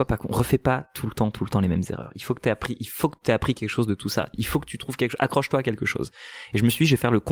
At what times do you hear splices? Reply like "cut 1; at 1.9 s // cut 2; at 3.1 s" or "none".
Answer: none